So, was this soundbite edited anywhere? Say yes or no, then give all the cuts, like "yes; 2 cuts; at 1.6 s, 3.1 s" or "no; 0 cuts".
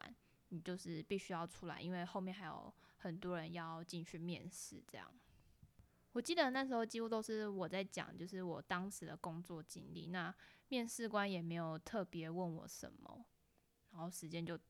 no; 0 cuts